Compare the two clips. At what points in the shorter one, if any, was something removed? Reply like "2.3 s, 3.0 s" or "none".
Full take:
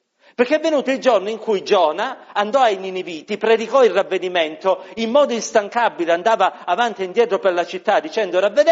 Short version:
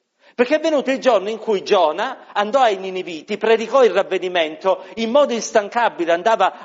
none